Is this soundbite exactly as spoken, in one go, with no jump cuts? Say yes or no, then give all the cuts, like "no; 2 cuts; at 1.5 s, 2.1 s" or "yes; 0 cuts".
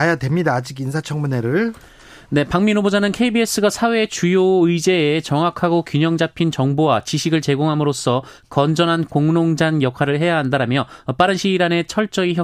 yes; 0 cuts